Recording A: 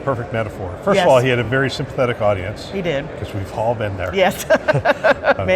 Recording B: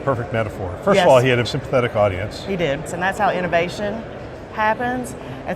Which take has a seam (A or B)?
B